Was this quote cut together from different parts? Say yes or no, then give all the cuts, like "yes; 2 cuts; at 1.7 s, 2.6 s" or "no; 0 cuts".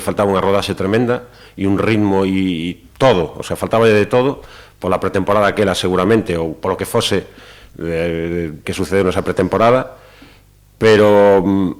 yes; 1 cut; at 8.6 s